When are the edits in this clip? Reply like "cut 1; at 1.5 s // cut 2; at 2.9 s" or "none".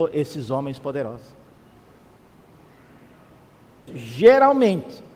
cut 1; at 3.9 s